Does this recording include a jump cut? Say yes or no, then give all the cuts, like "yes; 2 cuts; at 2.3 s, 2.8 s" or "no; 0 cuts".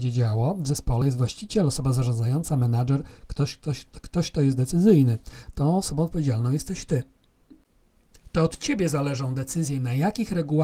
no; 0 cuts